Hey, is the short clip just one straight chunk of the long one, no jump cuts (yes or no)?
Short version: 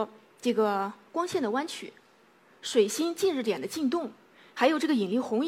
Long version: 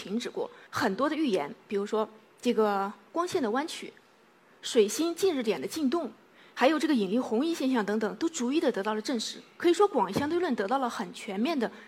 yes